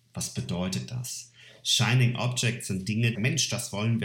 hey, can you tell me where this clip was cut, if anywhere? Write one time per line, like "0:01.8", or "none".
0:03.1